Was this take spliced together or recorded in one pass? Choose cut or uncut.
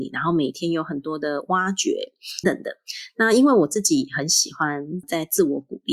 cut